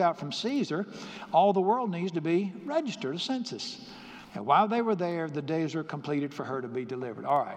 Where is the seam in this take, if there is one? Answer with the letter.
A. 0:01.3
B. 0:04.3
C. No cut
B